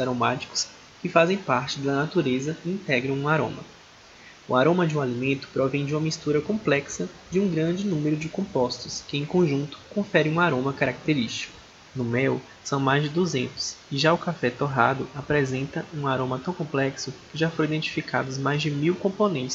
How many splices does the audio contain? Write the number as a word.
one